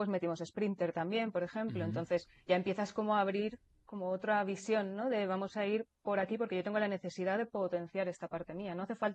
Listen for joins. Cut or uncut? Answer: cut